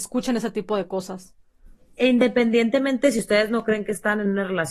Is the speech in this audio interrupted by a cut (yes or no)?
no